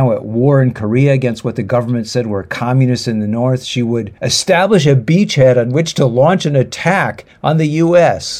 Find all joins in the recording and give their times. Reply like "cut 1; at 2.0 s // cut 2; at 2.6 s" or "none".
cut 1; at 4.2 s